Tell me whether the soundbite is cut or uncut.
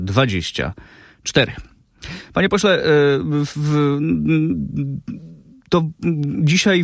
uncut